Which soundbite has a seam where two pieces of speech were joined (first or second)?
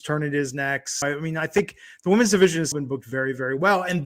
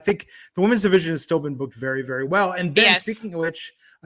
first